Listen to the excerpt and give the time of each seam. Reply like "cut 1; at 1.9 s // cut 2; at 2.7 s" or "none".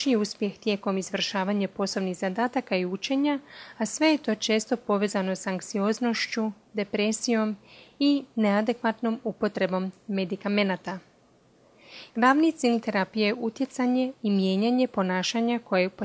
cut 1; at 12.1 s